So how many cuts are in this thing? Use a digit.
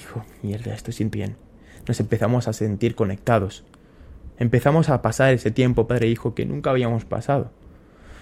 1